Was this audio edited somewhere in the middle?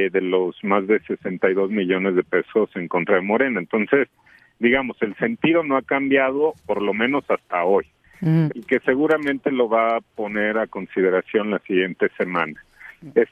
yes; 2 cuts; at 6.6 s, 8.5 s

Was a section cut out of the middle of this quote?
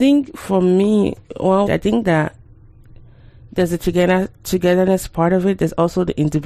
yes; 1 cut; at 1.7 s

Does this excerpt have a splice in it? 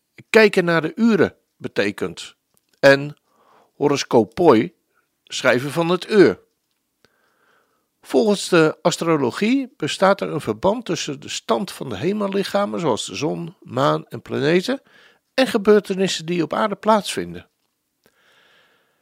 no; 0 cuts

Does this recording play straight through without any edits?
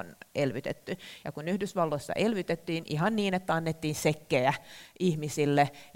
yes; 0 cuts

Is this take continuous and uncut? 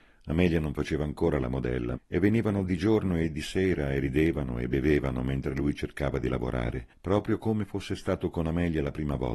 no; 2 cuts; at 1.9 s, 6.9 s

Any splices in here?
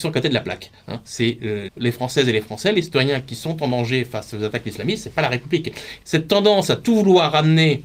yes; 2 cuts; at 1.7 s, 6.0 s

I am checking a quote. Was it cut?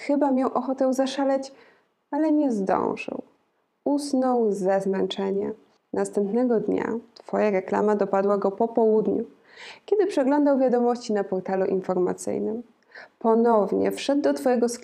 yes; 1 cut; at 5.8 s

